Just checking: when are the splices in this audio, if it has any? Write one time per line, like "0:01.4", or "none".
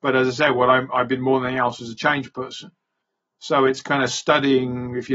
none

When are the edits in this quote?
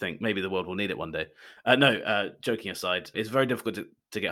0:03.1

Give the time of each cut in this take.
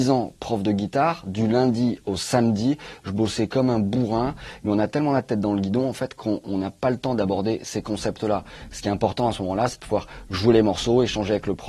none

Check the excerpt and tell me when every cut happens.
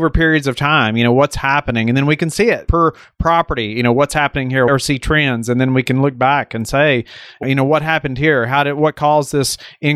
0:04.7
0:07.4

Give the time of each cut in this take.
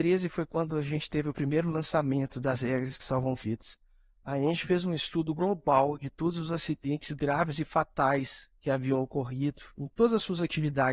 none

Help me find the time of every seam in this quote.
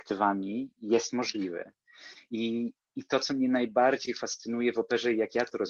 none

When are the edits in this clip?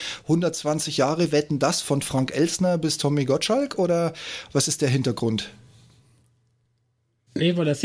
none

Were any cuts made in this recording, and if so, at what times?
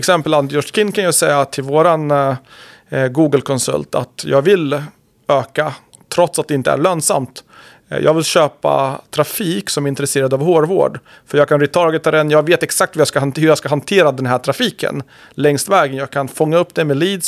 none

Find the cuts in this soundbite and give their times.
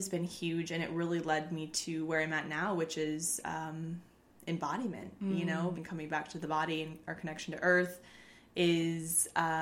0:05.7

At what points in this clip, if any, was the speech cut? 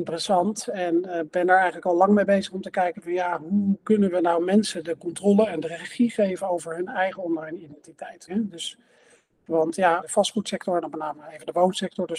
0:08.3
0:10.0

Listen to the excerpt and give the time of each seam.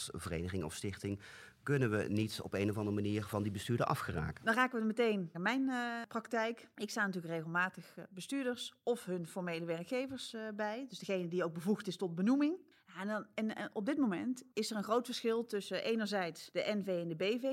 0:05.3

